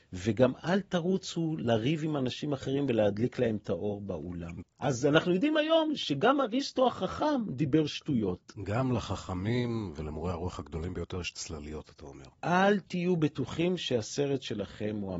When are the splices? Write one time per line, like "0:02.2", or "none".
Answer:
0:04.6
0:12.3